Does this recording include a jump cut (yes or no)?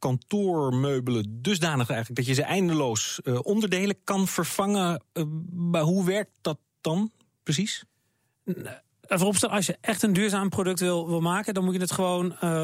no